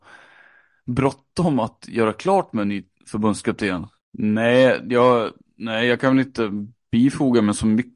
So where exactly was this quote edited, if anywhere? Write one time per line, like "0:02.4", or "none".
0:04.0